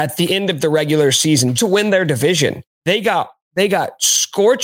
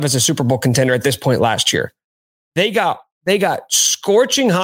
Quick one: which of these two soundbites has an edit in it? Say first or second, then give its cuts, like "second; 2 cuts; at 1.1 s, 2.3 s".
first; 2 cuts; at 1.6 s, 2.7 s